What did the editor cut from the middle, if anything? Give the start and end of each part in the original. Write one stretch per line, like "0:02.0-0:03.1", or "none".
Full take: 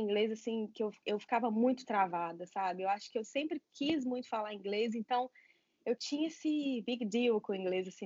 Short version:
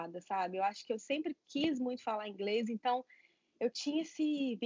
none